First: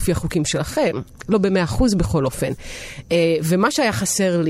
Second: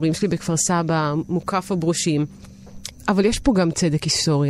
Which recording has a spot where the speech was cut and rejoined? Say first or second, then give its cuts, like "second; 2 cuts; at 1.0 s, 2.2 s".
second; 1 cut; at 2.9 s